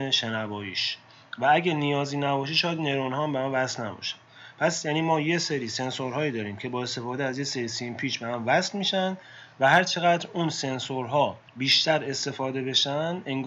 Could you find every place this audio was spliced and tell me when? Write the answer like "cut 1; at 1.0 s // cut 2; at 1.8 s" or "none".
cut 1; at 11.5 s